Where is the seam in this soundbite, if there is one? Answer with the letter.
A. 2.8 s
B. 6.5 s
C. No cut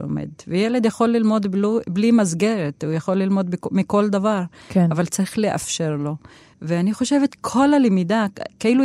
B